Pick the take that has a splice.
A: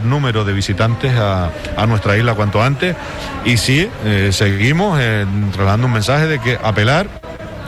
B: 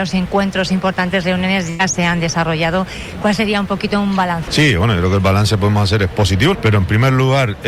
B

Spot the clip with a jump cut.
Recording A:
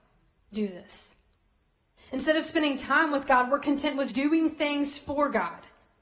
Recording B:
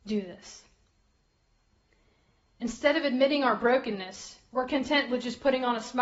A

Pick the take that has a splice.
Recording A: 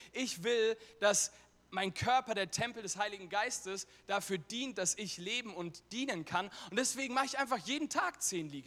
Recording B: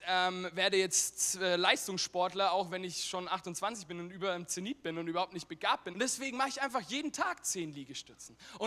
B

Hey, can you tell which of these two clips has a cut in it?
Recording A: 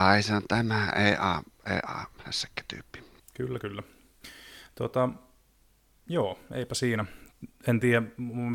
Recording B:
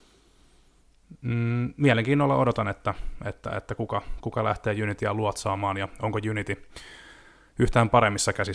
A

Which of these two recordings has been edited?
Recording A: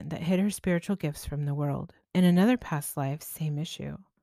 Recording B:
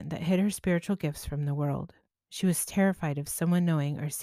A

